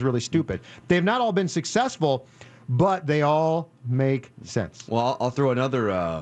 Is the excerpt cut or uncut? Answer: uncut